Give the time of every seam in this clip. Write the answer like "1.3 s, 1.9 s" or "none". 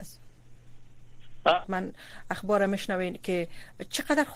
1.6 s